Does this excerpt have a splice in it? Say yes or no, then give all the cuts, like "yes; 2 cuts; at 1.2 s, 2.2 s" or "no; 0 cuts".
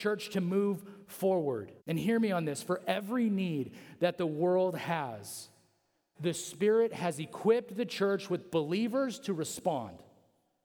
yes; 2 cuts; at 1.8 s, 6.1 s